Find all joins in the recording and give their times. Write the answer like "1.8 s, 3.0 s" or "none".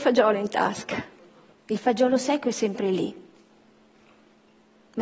1.5 s